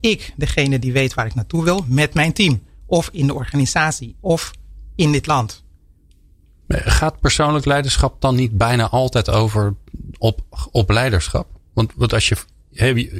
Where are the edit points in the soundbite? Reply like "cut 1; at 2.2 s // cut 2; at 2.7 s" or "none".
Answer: none